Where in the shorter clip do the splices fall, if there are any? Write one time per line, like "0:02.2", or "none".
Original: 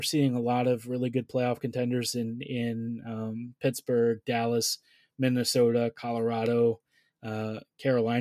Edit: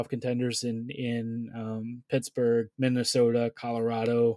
0:02.7